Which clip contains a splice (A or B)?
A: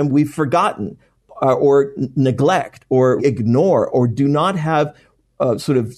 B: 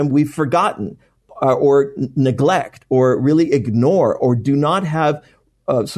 A